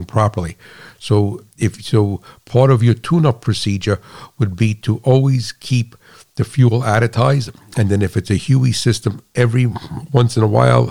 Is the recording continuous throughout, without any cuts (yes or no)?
yes